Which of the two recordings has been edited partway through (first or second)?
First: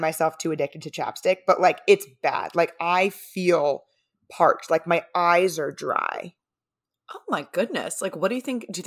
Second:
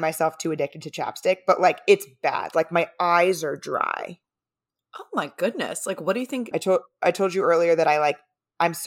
second